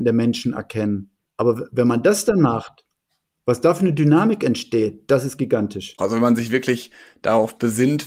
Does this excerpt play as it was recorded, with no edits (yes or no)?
no